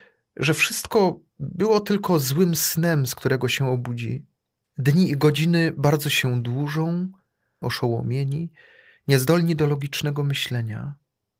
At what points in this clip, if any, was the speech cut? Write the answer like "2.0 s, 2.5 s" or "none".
4.6 s, 7.6 s